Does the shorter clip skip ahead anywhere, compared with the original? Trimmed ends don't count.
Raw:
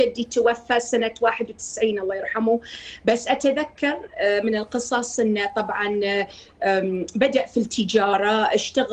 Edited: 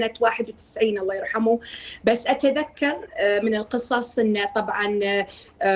no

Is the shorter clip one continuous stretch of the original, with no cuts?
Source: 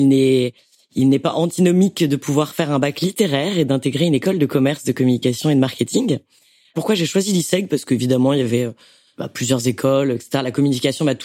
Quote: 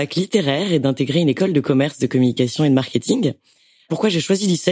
yes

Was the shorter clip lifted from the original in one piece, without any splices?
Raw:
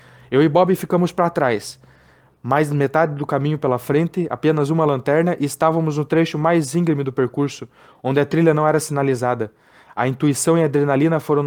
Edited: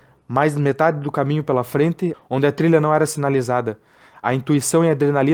no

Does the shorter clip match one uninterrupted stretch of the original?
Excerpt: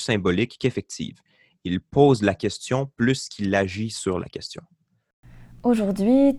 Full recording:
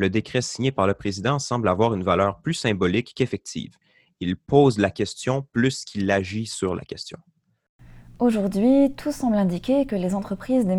yes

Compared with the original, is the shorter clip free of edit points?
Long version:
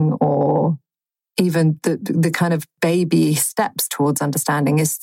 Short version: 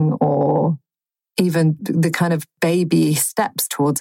no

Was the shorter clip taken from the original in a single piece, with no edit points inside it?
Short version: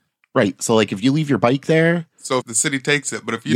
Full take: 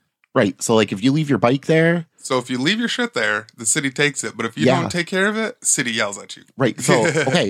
no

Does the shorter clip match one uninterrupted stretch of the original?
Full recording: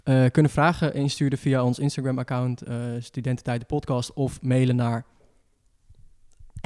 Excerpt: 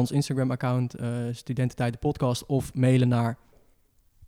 yes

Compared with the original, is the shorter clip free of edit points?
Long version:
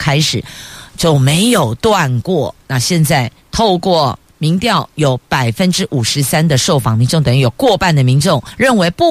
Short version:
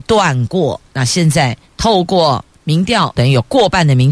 no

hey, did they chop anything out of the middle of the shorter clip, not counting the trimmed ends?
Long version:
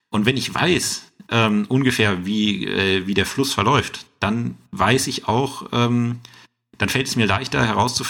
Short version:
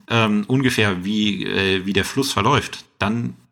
no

